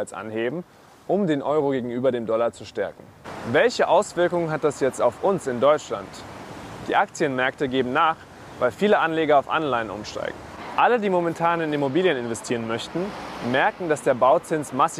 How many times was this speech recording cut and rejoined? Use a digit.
0